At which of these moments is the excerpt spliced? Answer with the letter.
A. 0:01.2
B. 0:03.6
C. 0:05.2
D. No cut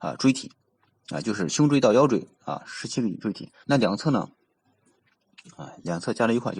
B